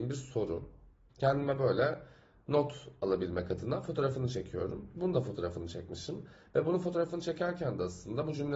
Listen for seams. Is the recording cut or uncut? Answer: cut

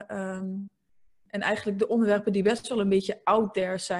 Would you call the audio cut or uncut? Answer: uncut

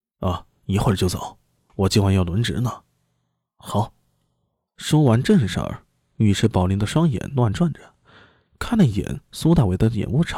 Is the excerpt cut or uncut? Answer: uncut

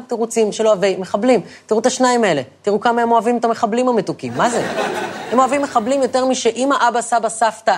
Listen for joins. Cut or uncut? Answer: uncut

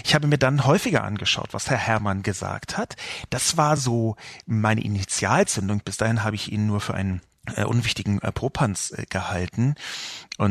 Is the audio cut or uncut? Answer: uncut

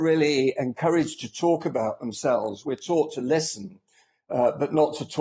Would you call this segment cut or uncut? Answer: uncut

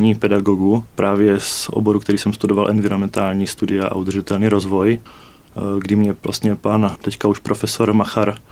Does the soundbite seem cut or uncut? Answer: uncut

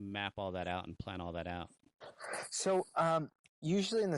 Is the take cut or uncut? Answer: uncut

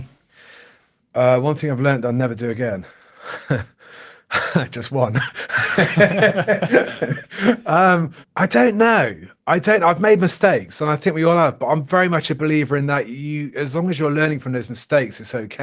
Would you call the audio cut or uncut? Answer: uncut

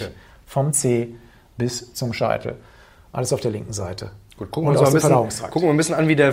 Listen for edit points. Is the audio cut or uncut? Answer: uncut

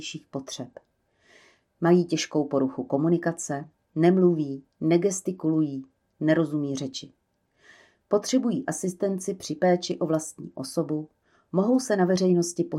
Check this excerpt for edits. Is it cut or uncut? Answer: uncut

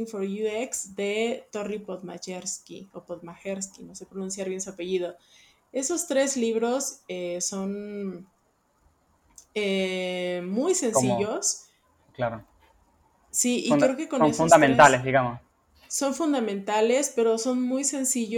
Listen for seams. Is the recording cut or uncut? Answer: uncut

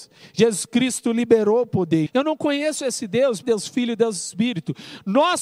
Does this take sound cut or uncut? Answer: cut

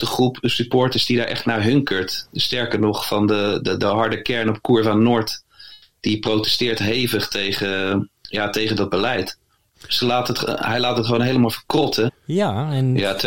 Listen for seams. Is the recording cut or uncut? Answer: cut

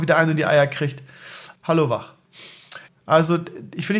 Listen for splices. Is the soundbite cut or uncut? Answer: cut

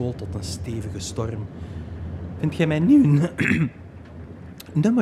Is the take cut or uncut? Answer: cut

